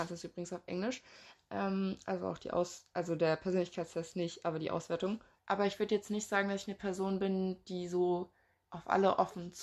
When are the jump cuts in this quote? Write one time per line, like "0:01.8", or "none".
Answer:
0:05.4